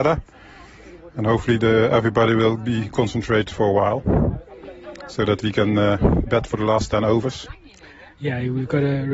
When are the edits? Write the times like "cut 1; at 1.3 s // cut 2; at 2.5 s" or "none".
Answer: none